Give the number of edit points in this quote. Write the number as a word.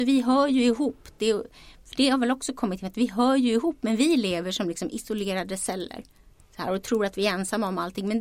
zero